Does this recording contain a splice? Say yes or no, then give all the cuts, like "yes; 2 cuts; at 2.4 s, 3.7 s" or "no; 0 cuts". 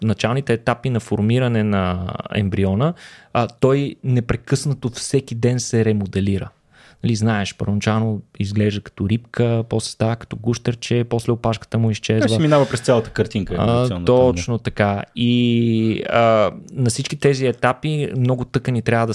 no; 0 cuts